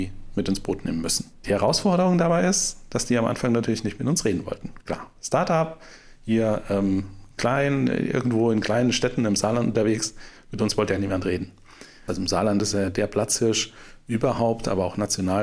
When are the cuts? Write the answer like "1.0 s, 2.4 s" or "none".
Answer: 12.1 s